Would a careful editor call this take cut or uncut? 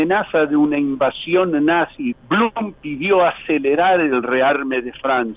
cut